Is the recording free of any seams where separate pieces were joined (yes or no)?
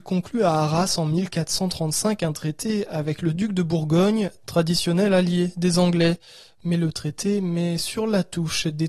yes